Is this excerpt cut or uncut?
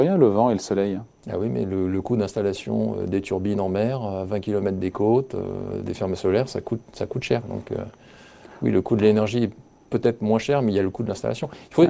uncut